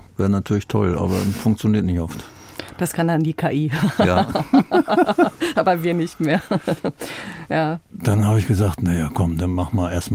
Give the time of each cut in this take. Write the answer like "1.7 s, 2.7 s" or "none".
none